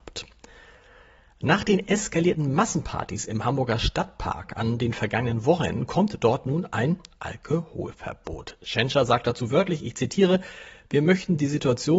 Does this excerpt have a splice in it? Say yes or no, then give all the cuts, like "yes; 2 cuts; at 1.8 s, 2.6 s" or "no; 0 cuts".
no; 0 cuts